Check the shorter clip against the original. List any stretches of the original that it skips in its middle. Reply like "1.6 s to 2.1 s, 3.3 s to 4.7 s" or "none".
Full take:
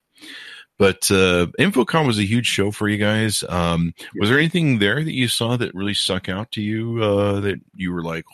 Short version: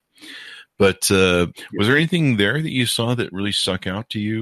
1.5 s to 3.9 s

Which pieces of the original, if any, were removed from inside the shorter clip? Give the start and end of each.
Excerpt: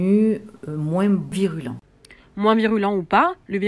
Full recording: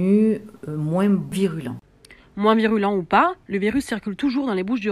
none

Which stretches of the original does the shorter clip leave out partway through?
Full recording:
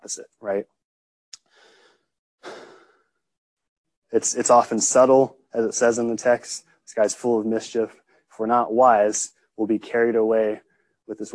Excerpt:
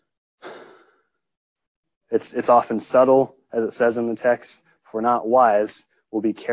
6.8 s to 8.2 s

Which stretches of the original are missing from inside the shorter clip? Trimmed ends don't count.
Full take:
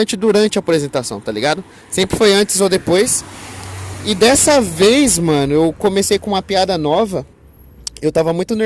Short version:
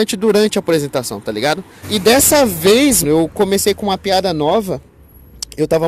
1.8 s to 4.0 s, 5.2 s to 5.5 s

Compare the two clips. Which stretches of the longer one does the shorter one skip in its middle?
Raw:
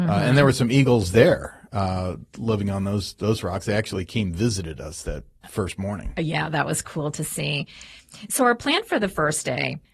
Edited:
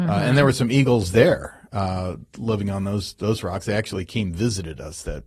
none

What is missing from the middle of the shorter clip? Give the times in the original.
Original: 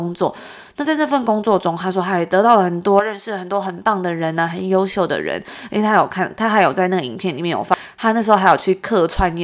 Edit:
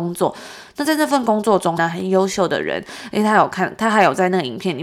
1.8 s to 4.4 s

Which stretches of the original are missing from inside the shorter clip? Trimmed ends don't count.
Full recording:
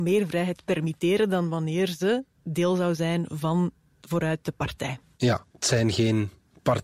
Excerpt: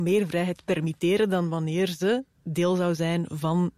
none

